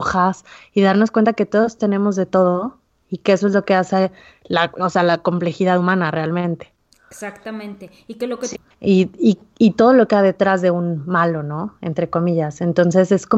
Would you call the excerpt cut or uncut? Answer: cut